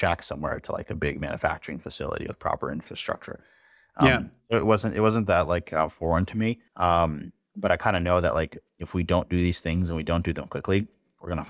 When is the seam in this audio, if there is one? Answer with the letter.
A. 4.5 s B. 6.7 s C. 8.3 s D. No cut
B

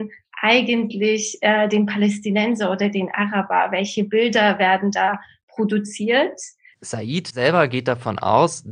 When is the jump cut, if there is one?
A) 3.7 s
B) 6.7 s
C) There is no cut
B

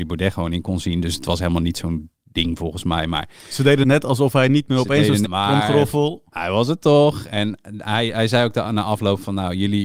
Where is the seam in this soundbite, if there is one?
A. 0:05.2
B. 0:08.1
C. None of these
A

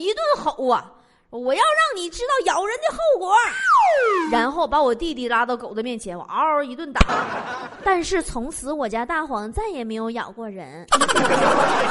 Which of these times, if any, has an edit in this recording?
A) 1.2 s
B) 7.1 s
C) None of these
B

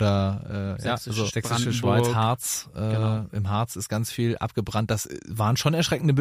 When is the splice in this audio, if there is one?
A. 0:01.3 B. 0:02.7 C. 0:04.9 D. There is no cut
A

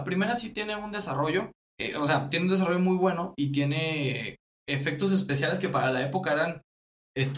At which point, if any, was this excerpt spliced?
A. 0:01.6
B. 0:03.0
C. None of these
A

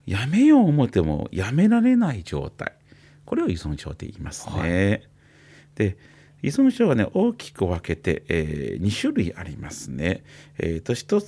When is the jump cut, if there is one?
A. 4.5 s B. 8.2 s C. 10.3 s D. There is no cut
D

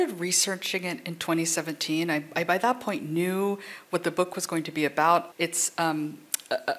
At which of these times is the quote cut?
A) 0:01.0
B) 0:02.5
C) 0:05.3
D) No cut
C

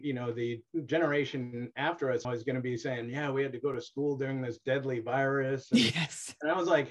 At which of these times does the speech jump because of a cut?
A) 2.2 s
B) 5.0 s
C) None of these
A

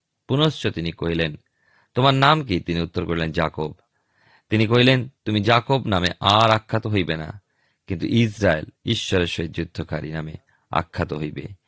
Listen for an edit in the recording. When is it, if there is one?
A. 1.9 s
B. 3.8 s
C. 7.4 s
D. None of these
D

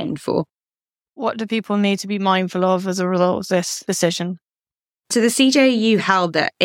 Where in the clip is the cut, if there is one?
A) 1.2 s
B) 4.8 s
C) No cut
A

